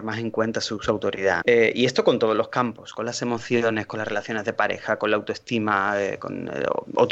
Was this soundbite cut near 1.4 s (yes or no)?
yes